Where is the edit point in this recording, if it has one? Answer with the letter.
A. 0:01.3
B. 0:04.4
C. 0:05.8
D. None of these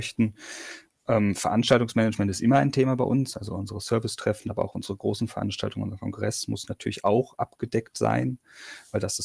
D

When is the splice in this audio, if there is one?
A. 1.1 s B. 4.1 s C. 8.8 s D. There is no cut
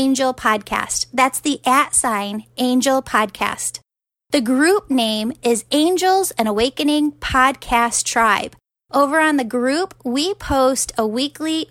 D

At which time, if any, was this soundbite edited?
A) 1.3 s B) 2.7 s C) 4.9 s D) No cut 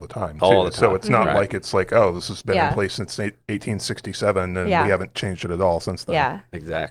D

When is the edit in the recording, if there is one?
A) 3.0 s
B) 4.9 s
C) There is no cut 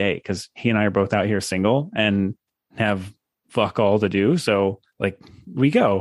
B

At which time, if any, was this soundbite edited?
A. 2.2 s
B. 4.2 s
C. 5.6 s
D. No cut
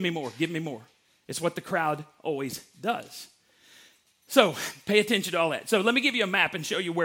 D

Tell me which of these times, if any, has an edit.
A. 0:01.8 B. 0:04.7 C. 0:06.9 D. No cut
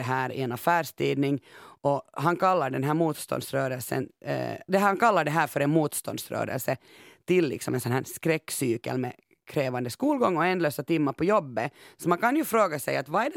B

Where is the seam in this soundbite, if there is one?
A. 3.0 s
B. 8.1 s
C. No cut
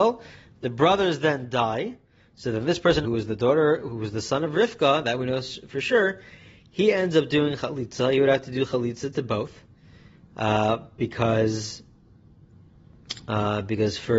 A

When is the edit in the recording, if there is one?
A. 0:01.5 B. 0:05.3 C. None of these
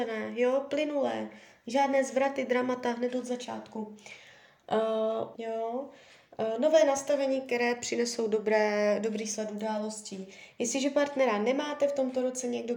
B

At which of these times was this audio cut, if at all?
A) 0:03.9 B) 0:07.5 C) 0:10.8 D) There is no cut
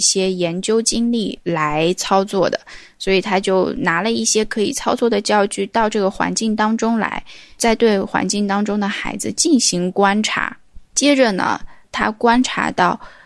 C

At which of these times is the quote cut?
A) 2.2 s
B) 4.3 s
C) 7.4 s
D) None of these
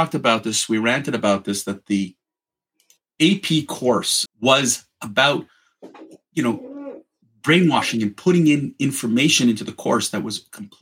B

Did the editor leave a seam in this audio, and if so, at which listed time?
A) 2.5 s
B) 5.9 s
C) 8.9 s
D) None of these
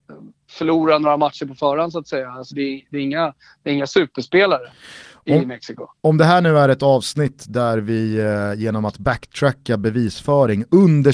A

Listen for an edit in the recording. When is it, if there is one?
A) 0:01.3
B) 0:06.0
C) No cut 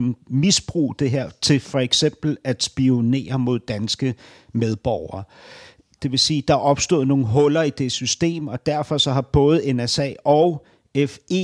B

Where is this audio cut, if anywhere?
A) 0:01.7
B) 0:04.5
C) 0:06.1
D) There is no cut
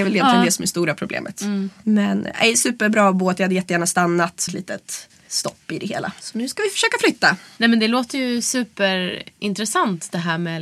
B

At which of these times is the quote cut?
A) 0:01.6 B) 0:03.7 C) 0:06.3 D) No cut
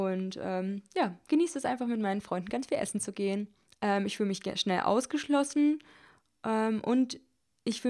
B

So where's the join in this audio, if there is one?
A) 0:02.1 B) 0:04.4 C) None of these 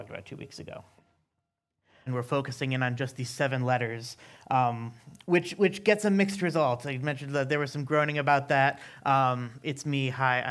A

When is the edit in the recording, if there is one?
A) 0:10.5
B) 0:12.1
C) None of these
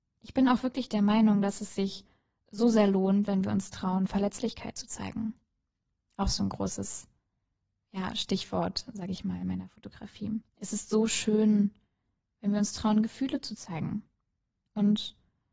A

